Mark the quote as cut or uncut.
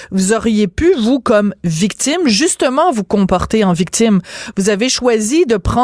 uncut